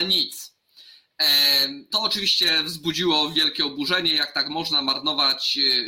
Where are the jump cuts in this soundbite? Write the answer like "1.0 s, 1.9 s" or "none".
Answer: 1.9 s

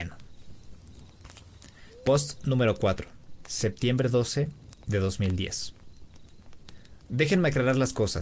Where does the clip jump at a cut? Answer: none

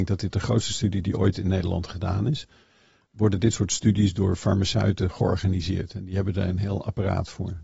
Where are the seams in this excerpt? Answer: 3.1 s

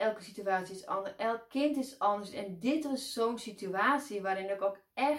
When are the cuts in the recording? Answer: none

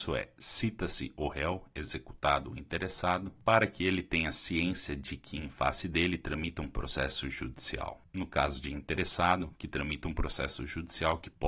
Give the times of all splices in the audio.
none

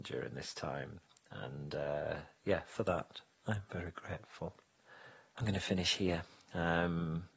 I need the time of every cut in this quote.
5.4 s

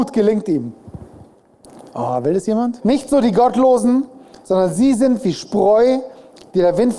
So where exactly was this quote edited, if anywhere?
2.8 s

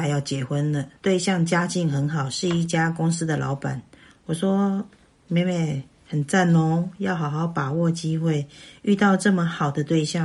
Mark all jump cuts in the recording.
1.0 s

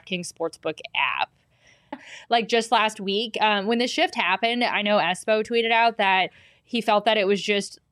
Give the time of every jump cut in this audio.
1.9 s

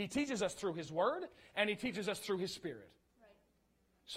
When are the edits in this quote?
none

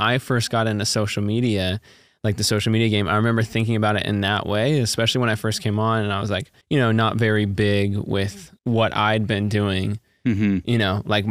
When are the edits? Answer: 6.6 s, 8.6 s

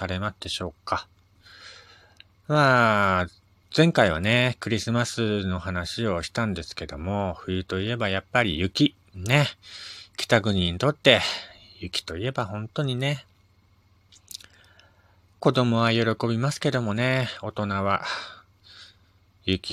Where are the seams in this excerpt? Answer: none

